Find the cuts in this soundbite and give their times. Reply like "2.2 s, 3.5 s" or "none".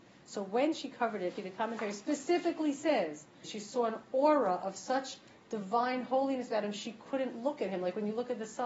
1.4 s, 3.4 s